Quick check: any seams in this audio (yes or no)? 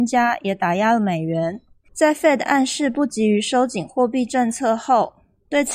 yes